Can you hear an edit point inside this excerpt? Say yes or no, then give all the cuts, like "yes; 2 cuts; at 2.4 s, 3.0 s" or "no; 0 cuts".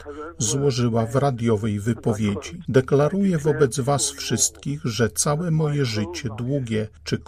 no; 0 cuts